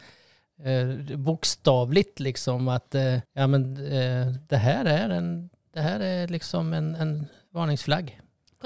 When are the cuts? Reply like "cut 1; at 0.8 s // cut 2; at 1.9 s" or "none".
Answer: cut 1; at 3.3 s